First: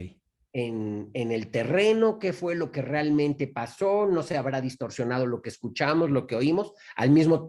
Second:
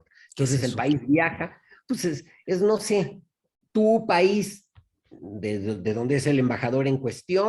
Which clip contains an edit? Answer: second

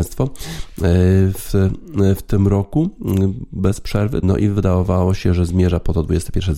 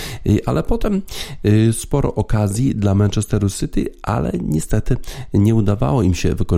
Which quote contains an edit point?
first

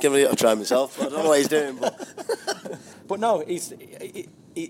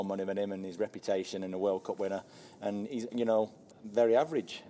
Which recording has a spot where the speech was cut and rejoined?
second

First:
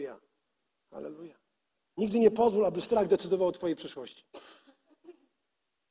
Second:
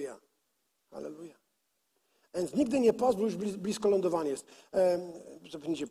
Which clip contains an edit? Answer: first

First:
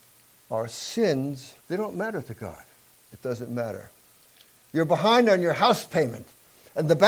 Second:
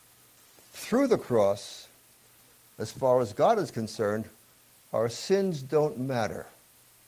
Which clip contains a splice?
first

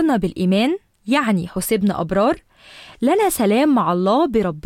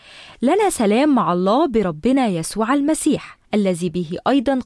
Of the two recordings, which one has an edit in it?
second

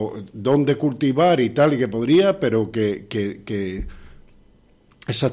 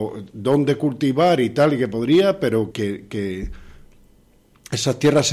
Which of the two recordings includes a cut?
second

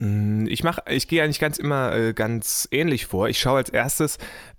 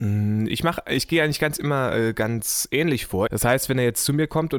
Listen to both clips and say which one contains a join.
second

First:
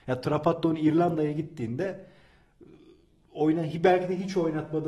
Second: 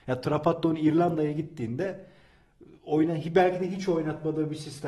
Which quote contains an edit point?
second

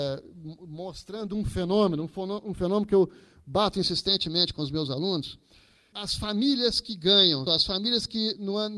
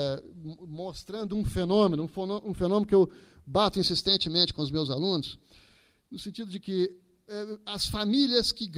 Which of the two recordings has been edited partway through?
first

